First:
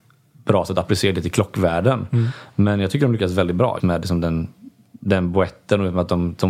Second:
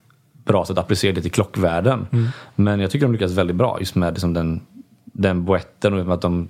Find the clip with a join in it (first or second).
first